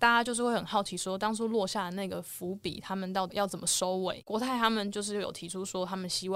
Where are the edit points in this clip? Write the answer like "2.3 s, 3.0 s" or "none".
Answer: 3.3 s

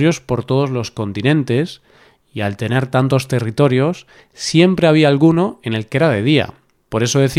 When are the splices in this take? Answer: none

